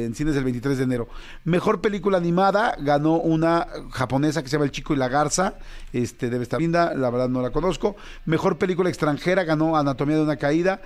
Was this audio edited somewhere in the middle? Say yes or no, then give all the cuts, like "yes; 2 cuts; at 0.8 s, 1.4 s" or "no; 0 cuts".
yes; 1 cut; at 6.6 s